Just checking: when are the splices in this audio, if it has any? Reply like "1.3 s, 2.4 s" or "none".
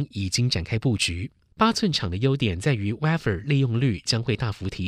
1.5 s